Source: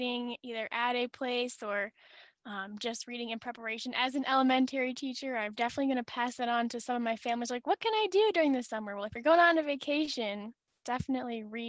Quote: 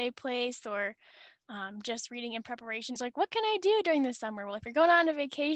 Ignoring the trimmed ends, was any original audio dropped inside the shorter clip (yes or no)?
yes